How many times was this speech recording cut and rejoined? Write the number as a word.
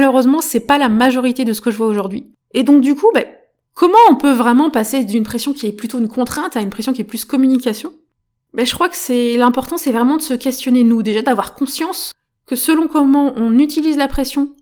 one